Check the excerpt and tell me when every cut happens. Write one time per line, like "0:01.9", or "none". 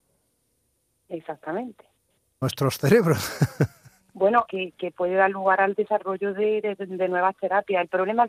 0:02.4
0:04.5